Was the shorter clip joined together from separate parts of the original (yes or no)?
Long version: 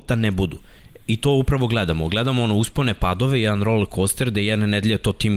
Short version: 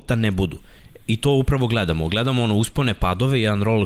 no